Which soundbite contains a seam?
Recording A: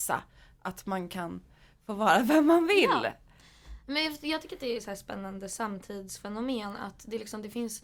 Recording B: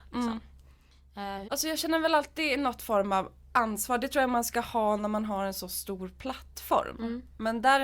B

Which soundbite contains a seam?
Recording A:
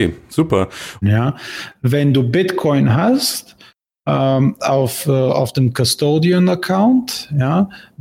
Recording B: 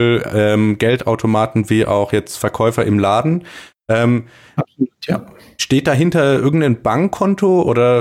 A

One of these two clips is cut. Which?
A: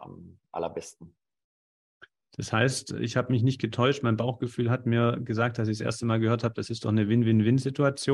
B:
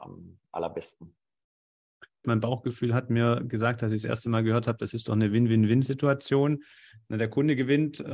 B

